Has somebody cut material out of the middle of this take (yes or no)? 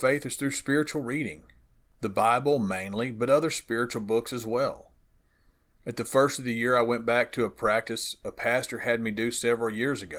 no